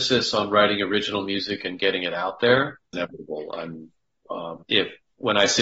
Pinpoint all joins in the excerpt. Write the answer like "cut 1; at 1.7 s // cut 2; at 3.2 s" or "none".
cut 1; at 2.9 s // cut 2; at 4.6 s